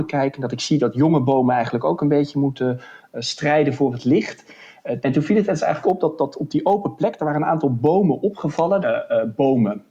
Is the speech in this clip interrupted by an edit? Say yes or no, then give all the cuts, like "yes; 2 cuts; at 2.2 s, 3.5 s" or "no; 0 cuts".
yes; 2 cuts; at 5.0 s, 8.8 s